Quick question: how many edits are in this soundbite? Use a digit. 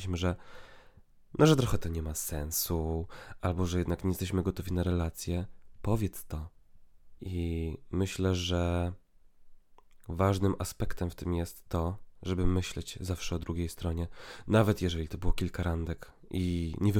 1